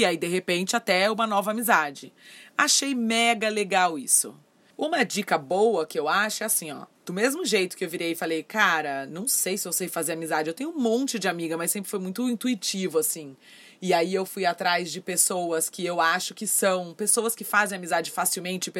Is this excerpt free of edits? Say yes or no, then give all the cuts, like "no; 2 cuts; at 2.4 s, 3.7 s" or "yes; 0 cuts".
yes; 0 cuts